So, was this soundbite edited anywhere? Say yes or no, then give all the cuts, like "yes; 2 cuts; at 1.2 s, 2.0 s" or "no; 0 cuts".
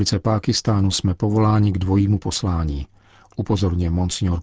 no; 0 cuts